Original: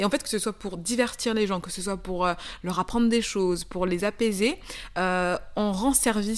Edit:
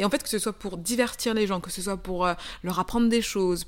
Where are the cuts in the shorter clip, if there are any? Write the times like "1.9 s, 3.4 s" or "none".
none